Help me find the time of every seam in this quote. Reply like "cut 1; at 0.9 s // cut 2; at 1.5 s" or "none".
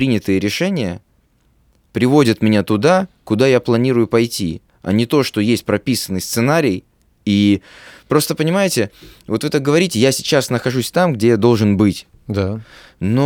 none